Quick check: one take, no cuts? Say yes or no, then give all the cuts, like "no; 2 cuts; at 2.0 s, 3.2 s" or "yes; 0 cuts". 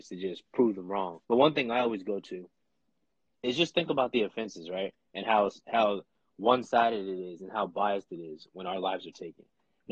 no; 1 cut; at 1.2 s